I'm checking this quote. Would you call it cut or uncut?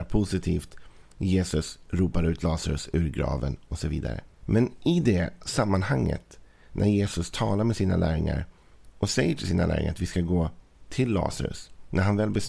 cut